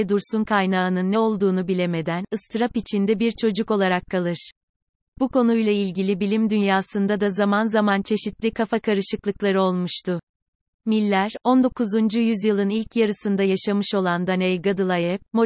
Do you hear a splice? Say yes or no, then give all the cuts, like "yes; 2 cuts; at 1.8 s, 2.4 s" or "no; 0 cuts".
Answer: no; 0 cuts